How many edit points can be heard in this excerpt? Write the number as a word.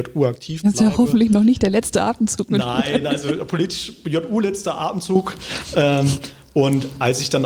zero